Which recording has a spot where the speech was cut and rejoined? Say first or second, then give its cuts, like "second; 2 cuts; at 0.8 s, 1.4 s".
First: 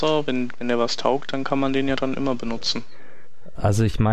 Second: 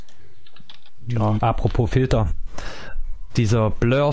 second; 1 cut; at 1.4 s